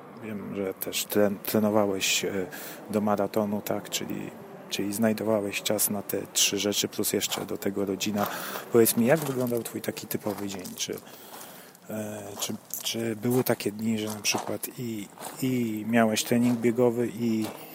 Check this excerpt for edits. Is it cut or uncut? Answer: uncut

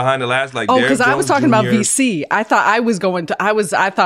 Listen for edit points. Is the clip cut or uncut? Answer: uncut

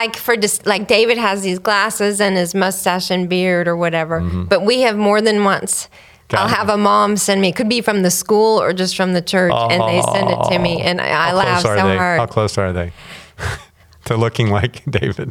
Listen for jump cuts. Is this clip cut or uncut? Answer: uncut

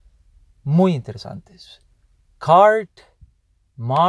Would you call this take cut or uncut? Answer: uncut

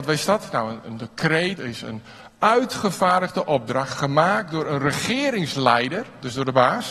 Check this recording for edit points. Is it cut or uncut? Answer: cut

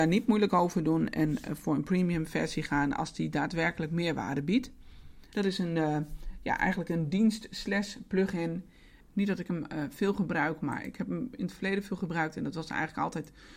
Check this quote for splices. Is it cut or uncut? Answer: cut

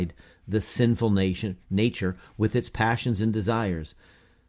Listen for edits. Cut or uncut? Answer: uncut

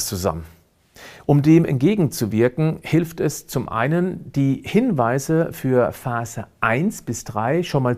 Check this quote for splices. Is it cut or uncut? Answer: uncut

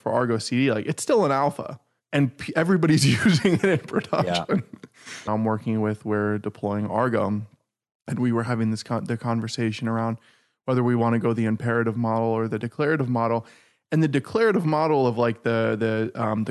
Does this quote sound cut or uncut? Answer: cut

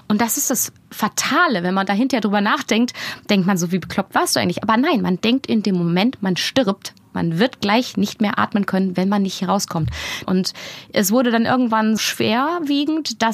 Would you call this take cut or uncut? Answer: cut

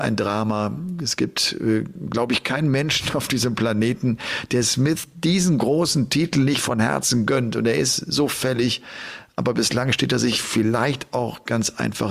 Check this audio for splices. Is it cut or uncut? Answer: uncut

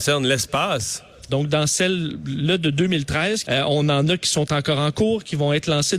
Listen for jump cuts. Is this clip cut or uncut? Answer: cut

